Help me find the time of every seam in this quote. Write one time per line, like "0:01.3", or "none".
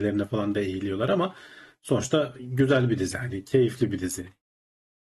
0:03.1

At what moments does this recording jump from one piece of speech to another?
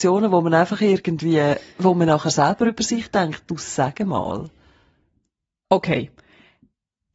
0:01.7

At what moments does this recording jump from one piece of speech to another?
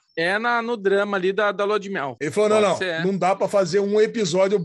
0:02.2

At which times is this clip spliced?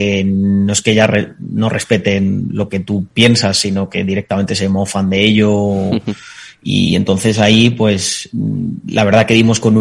none

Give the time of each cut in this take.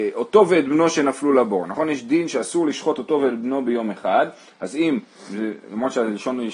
none

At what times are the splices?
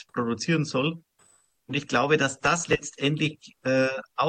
none

